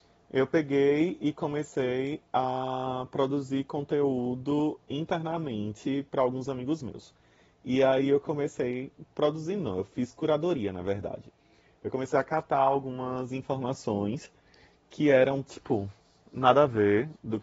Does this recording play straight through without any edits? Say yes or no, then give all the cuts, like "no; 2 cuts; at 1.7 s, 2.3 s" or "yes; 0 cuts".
yes; 0 cuts